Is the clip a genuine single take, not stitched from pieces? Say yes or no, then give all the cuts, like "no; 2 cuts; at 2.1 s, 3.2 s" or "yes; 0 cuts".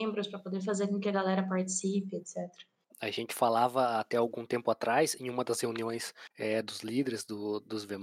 no; 2 cuts; at 2.9 s, 6.3 s